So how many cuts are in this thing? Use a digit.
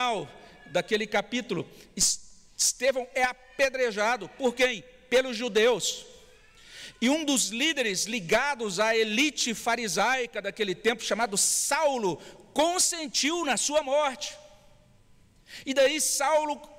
0